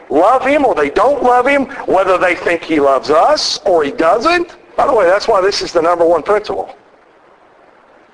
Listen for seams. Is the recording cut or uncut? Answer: cut